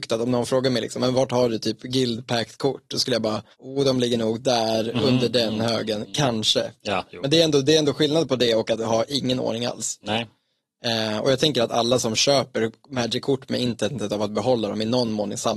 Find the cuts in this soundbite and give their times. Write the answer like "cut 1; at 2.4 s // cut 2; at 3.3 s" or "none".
cut 1; at 3.5 s